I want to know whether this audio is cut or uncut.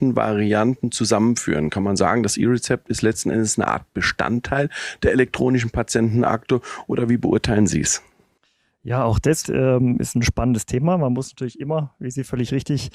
cut